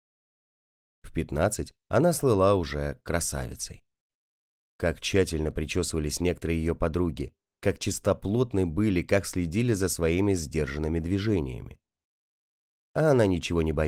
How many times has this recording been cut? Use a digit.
0